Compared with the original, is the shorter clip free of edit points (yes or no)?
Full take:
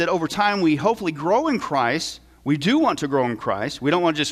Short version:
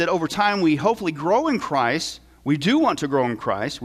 yes